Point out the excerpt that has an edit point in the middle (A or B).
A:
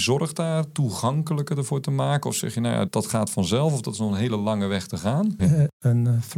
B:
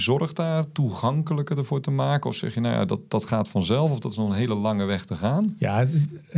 A